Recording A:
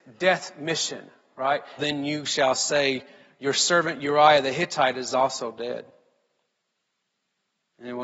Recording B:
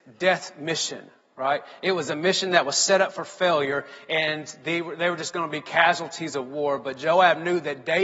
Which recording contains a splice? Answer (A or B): A